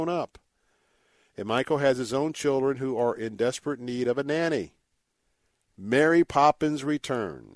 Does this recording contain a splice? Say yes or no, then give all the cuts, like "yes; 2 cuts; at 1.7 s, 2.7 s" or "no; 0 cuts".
no; 0 cuts